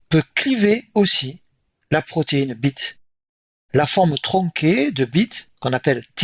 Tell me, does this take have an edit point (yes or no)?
no